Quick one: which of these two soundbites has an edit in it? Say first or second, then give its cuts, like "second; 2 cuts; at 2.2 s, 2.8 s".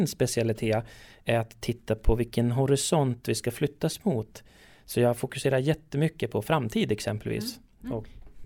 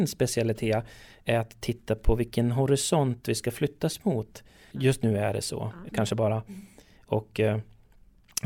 second; 2 cuts; at 4.7 s, 5.9 s